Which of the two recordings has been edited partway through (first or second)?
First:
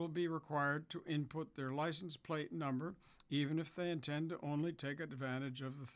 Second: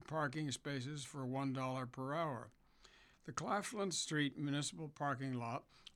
second